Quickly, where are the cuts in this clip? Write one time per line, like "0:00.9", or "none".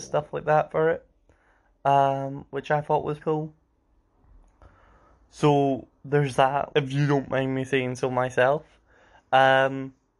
0:03.2
0:06.7